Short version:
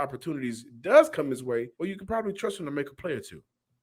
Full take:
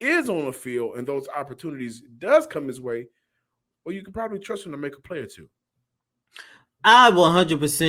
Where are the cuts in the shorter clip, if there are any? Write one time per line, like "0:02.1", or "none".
0:01.7